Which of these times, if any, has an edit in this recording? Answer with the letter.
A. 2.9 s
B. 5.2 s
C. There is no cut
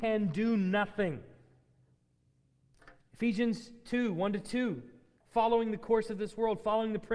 B